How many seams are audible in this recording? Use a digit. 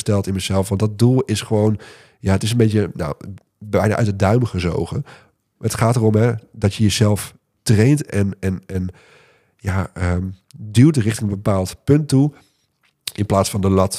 1